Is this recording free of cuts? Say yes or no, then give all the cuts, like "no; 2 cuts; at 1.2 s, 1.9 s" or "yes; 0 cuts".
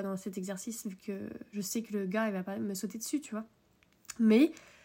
yes; 0 cuts